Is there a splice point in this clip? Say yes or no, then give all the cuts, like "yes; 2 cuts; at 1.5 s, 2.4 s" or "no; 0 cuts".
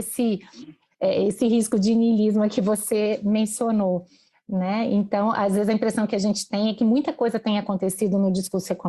no; 0 cuts